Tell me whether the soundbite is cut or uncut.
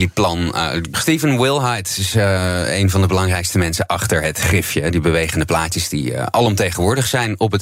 cut